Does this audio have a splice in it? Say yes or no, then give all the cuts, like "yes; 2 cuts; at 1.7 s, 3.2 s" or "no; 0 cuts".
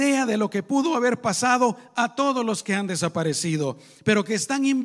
no; 0 cuts